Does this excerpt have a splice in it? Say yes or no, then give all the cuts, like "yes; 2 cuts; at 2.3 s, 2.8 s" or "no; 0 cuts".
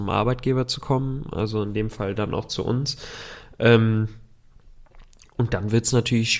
no; 0 cuts